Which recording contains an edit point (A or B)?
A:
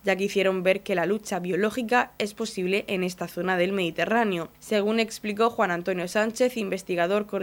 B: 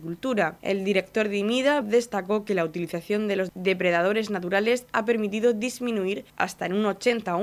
B